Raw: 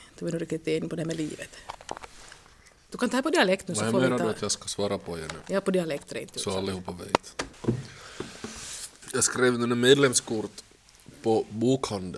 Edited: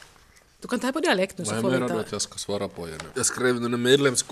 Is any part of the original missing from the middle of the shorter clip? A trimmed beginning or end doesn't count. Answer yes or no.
yes